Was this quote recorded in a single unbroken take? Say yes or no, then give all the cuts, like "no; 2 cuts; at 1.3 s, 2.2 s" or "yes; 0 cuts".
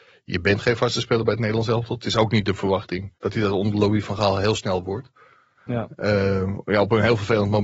no; 2 cuts; at 3.2 s, 5.6 s